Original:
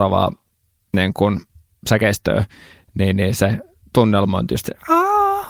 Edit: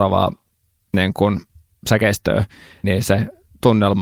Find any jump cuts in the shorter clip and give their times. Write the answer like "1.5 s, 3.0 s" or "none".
2.8 s